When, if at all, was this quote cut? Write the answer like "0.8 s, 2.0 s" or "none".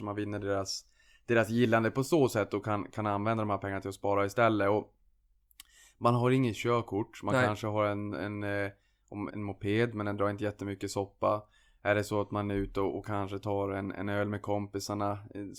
9.3 s